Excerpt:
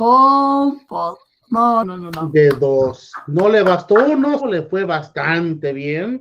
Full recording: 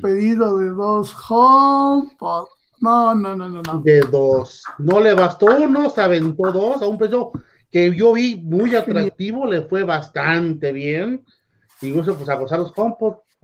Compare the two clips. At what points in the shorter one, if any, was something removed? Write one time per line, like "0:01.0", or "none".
0:01.8
0:04.4